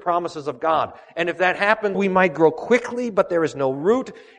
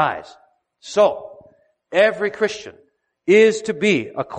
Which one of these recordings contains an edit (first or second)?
first